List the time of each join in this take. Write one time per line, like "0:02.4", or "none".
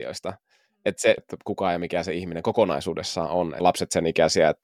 0:01.2
0:03.6